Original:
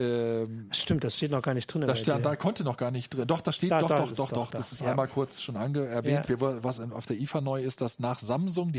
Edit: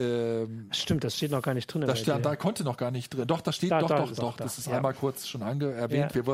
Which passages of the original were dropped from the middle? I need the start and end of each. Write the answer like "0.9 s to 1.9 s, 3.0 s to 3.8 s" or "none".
4.2 s to 4.3 s